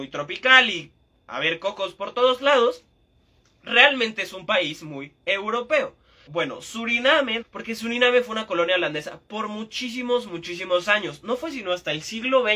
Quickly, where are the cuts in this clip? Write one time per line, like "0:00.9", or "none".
0:06.3
0:07.4